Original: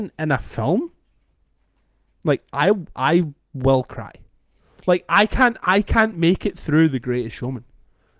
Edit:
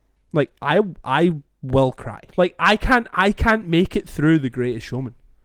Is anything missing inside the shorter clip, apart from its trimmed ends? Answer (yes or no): yes